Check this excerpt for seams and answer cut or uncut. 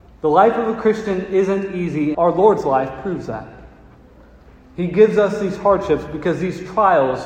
cut